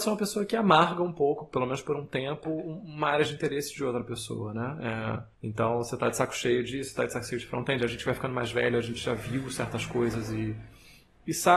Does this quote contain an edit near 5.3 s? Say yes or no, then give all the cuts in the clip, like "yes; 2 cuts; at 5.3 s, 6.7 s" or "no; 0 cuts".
yes; 1 cut; at 5.3 s